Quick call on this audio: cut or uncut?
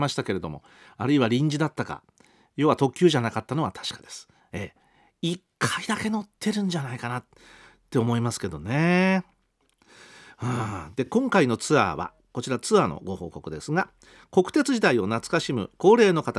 uncut